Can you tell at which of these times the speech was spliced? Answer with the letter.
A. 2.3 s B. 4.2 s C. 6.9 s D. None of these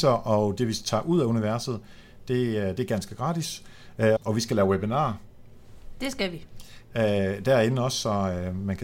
B